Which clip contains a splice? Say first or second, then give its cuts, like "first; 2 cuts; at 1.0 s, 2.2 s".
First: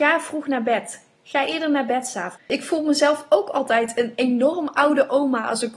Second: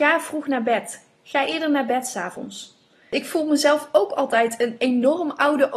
first; 1 cut; at 2.4 s